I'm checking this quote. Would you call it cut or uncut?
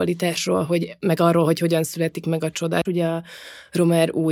cut